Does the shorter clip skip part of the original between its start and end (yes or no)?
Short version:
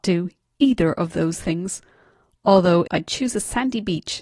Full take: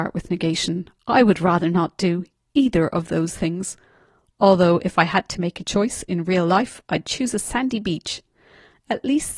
yes